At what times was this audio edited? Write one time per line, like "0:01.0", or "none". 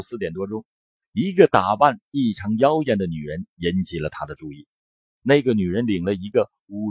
0:01.0